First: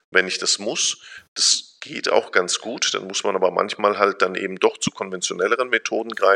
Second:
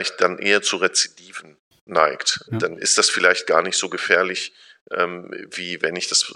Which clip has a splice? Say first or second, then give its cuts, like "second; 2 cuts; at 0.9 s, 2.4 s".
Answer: second; 1 cut; at 2.5 s